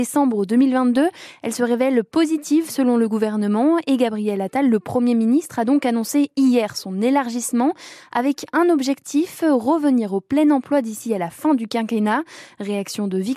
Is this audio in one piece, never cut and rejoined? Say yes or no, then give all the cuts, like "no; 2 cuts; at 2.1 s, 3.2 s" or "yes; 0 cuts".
yes; 0 cuts